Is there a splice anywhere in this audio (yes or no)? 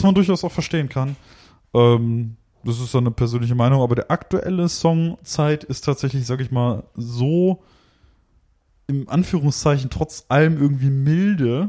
no